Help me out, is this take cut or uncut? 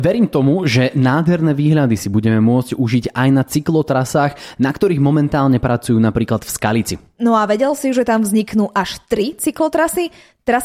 uncut